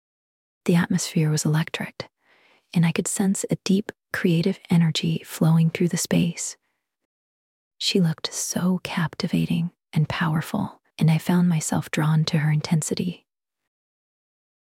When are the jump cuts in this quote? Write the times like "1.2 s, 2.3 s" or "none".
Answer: 7.6 s, 10.9 s